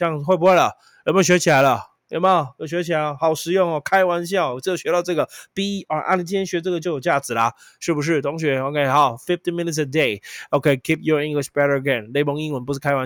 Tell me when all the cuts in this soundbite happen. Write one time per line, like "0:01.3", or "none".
0:06.8